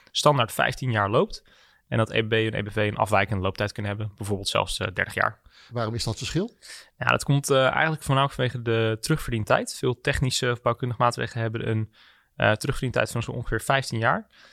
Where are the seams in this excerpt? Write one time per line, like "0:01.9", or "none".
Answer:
0:05.7